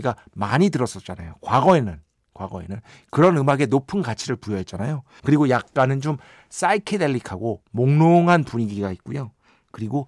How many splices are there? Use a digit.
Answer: 1